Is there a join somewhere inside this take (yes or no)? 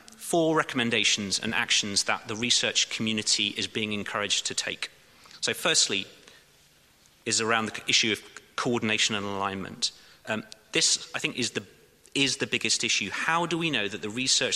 no